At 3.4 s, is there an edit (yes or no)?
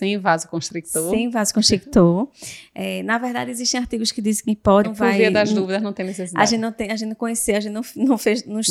no